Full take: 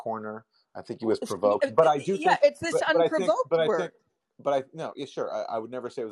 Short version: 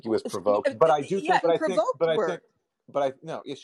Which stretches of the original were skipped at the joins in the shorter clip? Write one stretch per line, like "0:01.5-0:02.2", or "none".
0:02.4-0:02.9